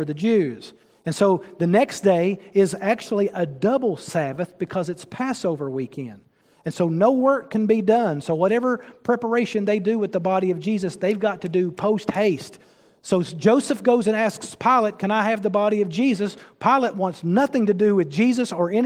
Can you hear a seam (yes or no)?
no